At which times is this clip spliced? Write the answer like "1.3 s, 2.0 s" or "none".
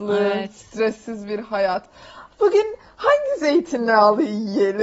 none